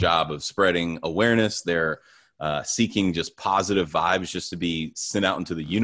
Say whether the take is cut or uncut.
uncut